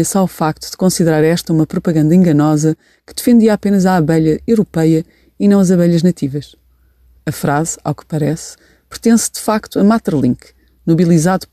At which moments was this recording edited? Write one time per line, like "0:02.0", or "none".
0:07.2